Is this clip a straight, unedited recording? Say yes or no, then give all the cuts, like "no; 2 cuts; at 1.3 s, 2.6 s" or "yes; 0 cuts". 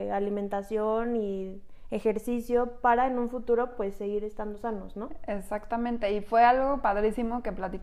yes; 0 cuts